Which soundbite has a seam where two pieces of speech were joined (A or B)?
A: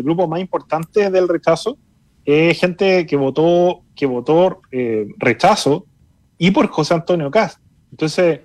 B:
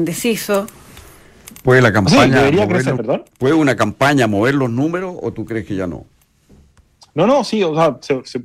B